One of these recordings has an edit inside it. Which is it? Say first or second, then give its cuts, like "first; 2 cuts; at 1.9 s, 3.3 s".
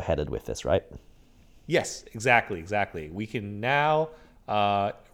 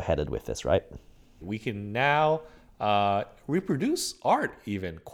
second; 1 cut; at 1.4 s